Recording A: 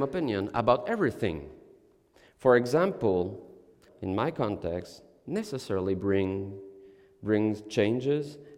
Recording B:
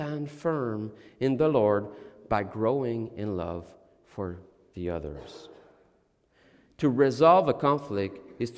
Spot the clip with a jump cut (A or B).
A